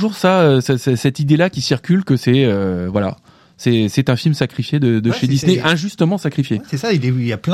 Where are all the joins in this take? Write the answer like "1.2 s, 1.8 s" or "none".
none